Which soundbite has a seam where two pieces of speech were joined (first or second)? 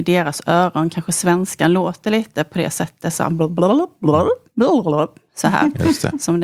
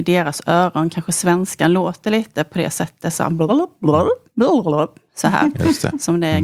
second